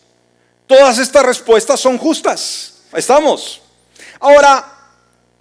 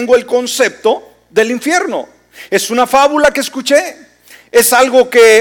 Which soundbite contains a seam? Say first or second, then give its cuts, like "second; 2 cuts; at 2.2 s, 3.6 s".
first; 1 cut; at 2.9 s